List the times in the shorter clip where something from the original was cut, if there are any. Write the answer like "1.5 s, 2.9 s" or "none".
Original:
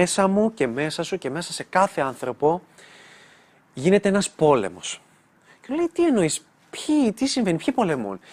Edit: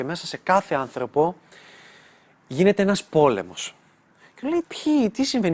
4.6 s